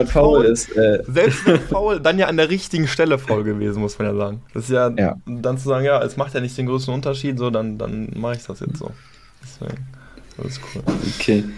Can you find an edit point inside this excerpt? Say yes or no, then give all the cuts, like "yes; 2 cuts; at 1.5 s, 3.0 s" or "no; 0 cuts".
yes; 1 cut; at 4.5 s